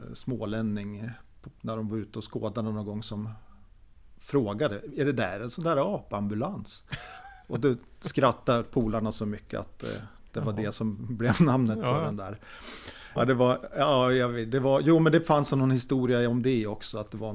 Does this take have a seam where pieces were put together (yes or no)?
yes